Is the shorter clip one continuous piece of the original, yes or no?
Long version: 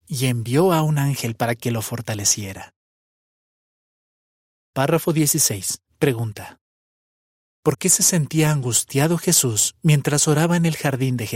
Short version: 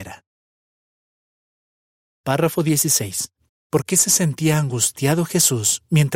no